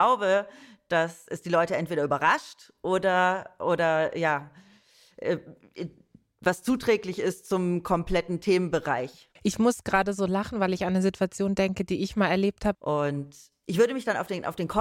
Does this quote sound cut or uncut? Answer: cut